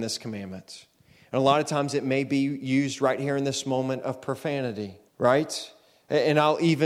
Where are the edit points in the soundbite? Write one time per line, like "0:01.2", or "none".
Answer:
0:05.1